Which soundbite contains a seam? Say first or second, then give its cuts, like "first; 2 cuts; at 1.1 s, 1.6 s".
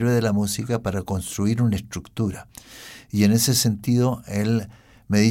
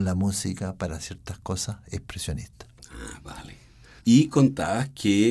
second; 1 cut; at 4.0 s